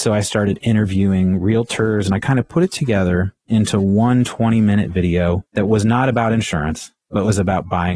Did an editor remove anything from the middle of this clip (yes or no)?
yes